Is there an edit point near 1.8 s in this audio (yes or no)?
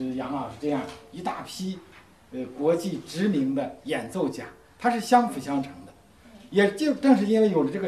no